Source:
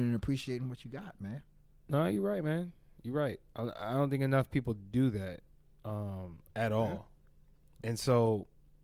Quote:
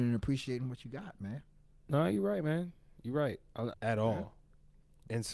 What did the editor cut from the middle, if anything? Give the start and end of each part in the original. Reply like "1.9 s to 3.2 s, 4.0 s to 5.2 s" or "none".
3.7 s to 6.5 s